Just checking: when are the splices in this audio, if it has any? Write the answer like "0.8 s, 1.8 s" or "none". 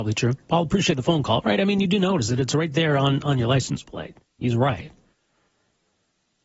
none